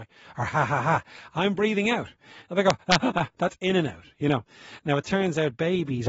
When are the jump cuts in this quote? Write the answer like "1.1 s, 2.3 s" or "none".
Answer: 3.0 s